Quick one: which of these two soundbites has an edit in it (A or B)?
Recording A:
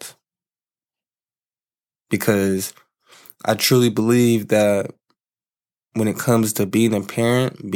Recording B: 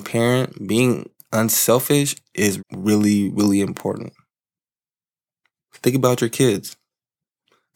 B